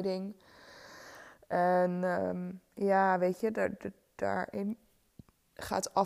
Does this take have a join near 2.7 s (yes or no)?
no